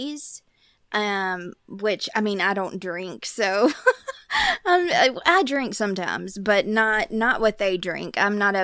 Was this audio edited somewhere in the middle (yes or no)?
no